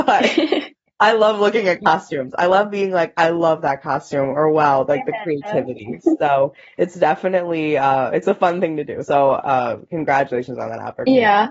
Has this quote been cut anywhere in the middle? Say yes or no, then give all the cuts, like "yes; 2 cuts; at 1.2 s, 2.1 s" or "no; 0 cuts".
no; 0 cuts